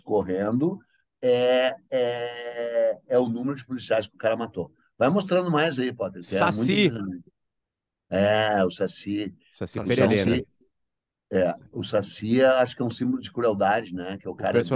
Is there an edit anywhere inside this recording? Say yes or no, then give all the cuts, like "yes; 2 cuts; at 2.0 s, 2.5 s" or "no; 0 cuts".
no; 0 cuts